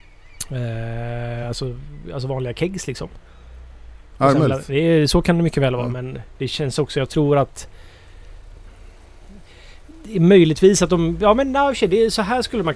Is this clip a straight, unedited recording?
yes; 0 cuts

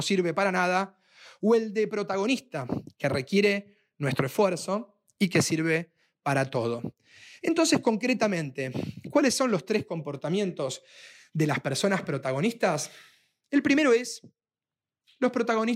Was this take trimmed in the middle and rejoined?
no; 0 cuts

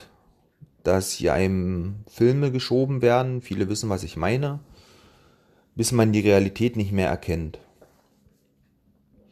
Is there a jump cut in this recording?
no; 0 cuts

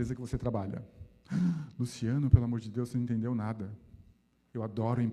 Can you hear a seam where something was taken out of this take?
no; 0 cuts

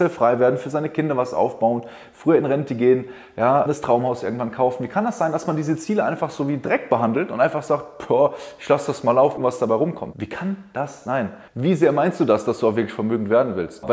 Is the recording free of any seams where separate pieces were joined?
no; 2 cuts; at 9.4 s, 11.5 s

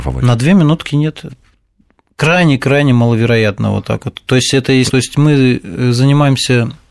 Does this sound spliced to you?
yes; 2 cuts; at 1.3 s, 4.9 s

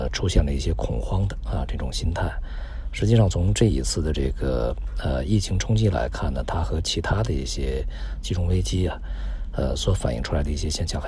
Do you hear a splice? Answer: no; 0 cuts

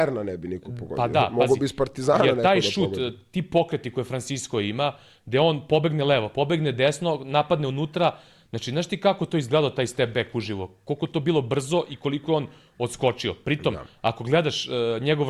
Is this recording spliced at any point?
no; 0 cuts

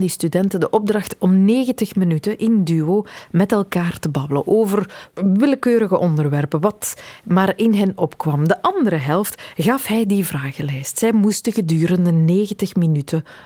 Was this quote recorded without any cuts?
yes; 0 cuts

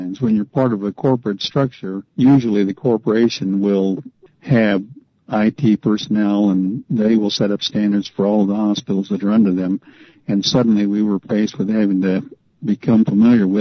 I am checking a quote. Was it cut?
yes; 1 cut; at 2.1 s

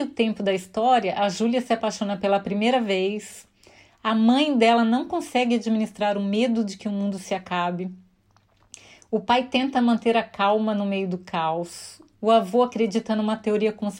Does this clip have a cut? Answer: no; 0 cuts

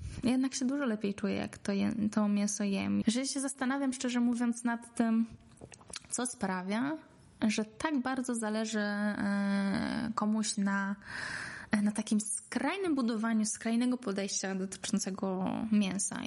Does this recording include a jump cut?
yes; 1 cut; at 3.0 s

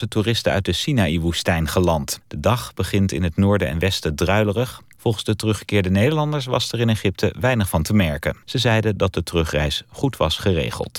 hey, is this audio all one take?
no; 3 cuts; at 2.2 s, 5.0 s, 8.4 s

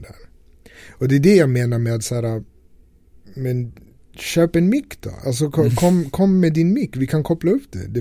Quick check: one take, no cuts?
yes; 0 cuts

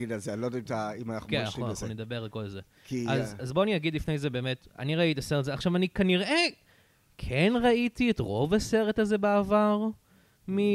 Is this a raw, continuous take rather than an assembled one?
yes; 0 cuts

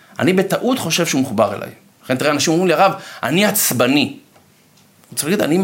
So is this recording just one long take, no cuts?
yes; 0 cuts

